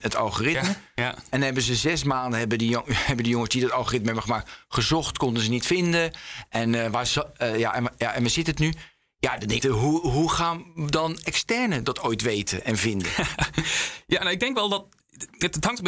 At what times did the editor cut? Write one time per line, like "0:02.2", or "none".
0:09.6